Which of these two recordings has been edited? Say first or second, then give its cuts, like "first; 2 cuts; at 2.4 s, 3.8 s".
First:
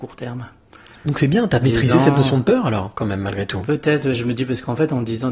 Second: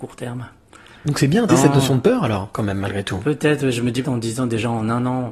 second; 2 cuts; at 1.5 s, 4.0 s